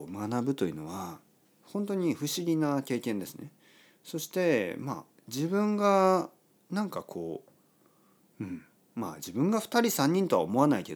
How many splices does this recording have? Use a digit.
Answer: 0